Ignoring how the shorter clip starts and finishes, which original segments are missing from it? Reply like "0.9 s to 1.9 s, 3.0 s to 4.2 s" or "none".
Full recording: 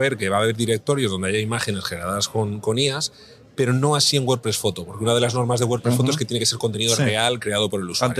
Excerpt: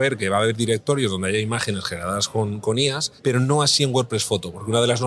3.2 s to 3.5 s